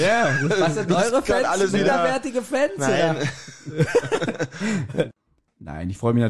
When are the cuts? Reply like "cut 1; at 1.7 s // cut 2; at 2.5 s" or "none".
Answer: none